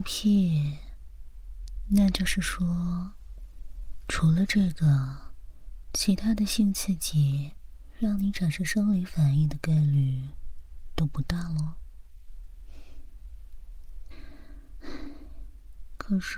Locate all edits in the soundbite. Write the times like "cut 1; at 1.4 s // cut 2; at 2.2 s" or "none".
cut 1; at 14.1 s